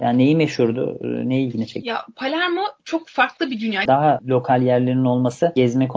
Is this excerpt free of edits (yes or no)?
no